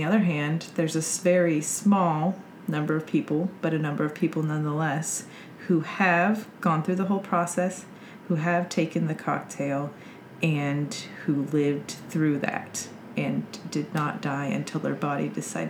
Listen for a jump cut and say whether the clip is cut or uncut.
uncut